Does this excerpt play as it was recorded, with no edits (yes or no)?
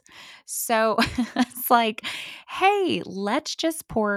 yes